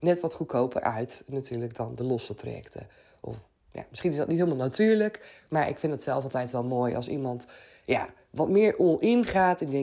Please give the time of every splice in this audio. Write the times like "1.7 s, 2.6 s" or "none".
none